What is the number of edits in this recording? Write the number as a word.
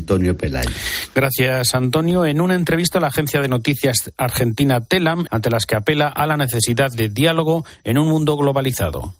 one